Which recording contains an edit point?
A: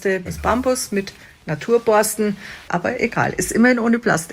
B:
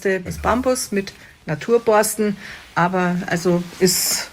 A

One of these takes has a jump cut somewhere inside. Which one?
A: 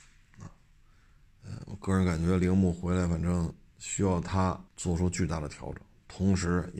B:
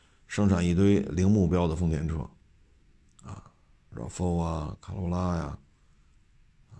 A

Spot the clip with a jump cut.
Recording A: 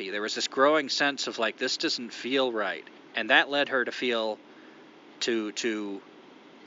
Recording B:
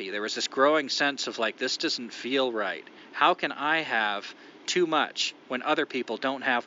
A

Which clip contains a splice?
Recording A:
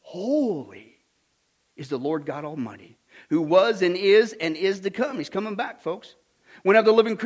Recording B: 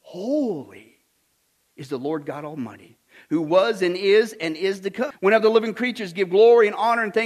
B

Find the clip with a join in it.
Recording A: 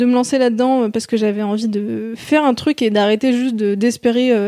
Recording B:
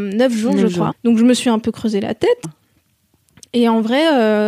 B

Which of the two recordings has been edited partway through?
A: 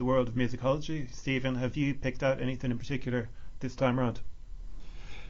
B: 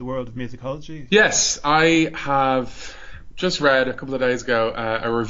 B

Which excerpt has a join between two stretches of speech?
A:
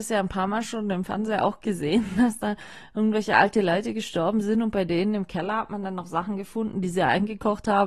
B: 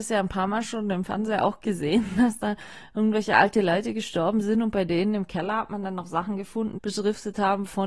B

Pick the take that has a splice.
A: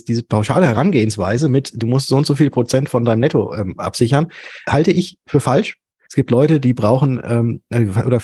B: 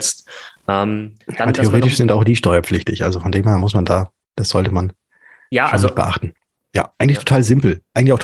B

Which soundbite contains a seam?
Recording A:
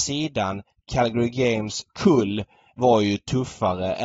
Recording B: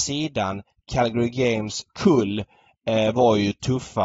A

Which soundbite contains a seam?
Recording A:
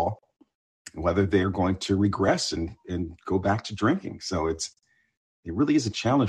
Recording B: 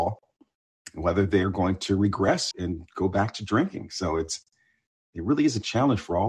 B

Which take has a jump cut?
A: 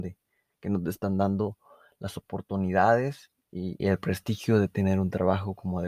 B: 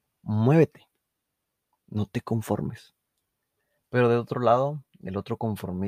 A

